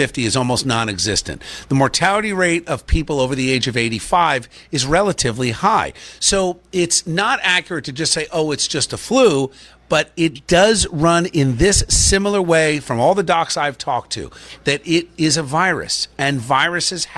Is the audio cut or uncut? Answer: uncut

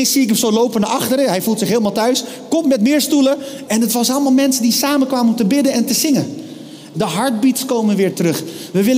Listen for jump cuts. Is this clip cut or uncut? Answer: cut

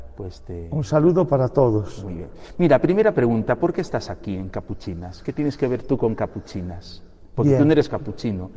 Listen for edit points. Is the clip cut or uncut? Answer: uncut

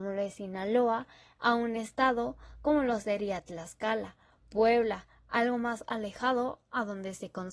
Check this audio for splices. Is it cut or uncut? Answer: uncut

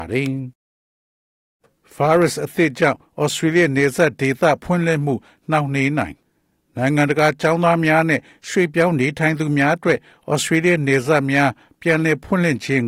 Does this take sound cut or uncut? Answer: uncut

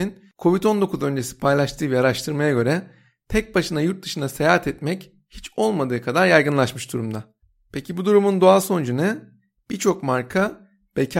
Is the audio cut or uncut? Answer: uncut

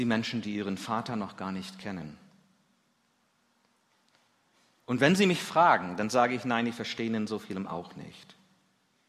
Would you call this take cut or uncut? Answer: uncut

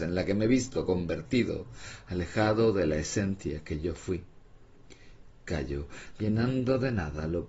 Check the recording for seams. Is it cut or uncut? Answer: cut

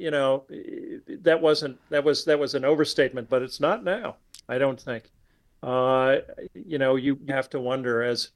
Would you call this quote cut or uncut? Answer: cut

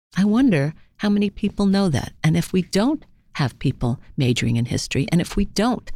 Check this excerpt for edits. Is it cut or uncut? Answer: uncut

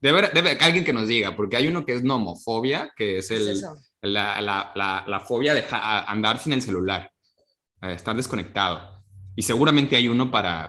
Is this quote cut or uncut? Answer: uncut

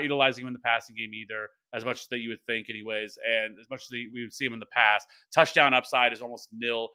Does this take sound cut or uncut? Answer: cut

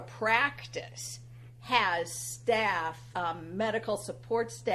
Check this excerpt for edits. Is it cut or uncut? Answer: cut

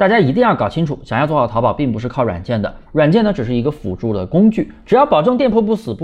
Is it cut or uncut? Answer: uncut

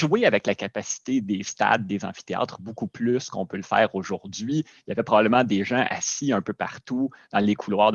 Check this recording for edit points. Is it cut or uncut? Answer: uncut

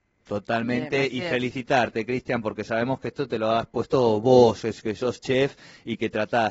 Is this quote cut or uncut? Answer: uncut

